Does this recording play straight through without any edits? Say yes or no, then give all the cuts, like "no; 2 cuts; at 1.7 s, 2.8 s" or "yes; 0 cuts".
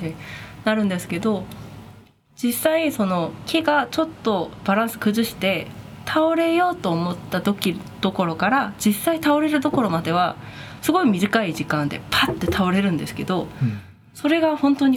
yes; 0 cuts